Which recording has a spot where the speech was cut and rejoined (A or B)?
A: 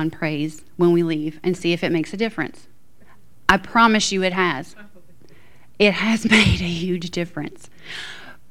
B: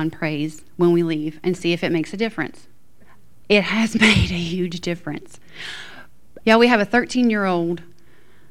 B